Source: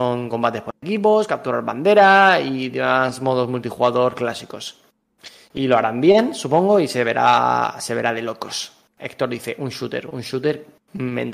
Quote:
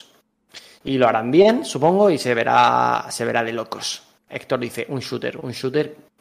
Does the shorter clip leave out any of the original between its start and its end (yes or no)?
no